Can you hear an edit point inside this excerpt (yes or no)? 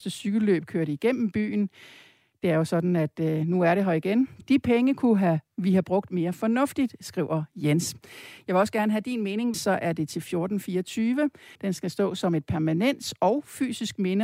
yes